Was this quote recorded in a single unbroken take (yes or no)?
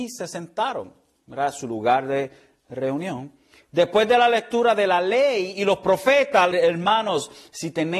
no